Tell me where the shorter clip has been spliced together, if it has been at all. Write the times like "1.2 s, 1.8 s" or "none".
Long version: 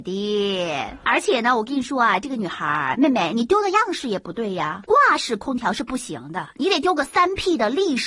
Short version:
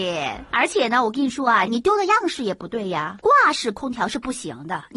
1.7 s